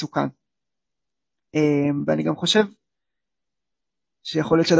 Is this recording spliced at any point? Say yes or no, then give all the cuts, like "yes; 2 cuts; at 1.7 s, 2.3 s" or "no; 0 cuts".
no; 0 cuts